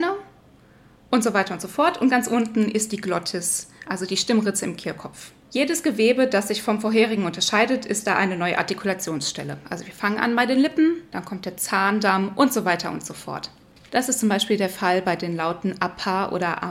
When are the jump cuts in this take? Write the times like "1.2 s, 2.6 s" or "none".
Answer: 11.1 s, 13.9 s